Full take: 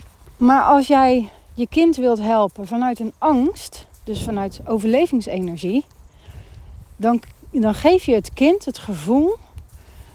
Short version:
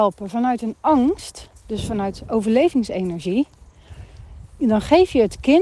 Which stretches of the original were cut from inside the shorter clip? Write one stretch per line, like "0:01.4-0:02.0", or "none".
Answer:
0:07.0-0:07.5